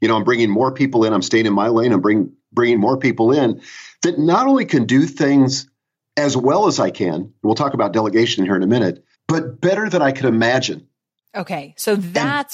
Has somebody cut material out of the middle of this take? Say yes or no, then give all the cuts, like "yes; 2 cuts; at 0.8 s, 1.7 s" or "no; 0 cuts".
yes; 1 cut; at 9.1 s